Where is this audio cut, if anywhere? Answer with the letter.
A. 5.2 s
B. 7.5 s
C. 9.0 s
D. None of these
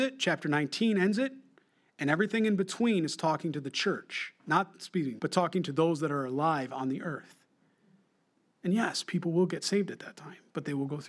A